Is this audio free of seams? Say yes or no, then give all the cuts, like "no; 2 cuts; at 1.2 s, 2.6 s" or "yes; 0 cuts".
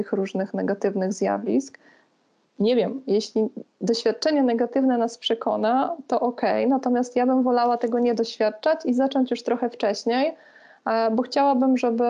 yes; 0 cuts